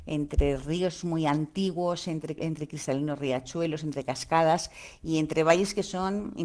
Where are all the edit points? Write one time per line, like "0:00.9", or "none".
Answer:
0:02.4